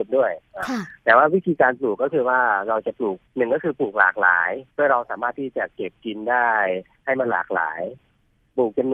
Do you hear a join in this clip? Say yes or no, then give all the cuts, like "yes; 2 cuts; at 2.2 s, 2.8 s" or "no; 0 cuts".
yes; 2 cuts; at 3.3 s, 4.7 s